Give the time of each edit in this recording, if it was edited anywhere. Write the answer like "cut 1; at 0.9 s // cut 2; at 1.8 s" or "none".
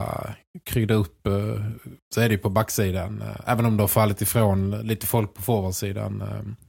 cut 1; at 2.0 s